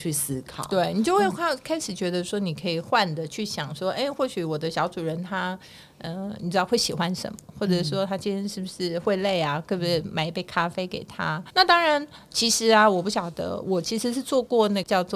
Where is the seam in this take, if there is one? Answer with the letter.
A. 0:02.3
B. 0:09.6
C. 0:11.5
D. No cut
C